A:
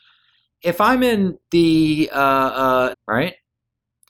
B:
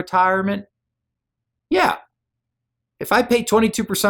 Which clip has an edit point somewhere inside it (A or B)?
A